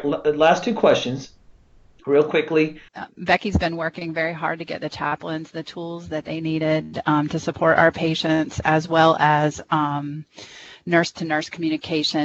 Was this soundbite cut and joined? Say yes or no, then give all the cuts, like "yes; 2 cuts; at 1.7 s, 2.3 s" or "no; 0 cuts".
yes; 1 cut; at 2.9 s